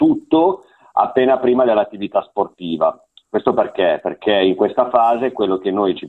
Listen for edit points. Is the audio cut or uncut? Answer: uncut